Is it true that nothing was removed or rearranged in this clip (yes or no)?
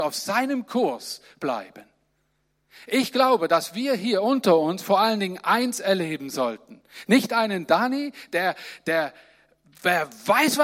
yes